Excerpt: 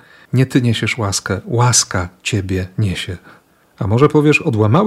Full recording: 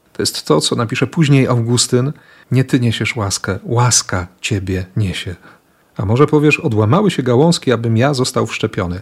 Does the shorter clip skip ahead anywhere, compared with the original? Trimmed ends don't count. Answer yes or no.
no